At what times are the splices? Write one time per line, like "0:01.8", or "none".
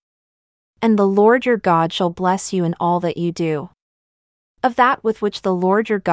0:04.5